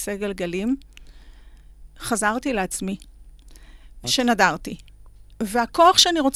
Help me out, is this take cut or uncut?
cut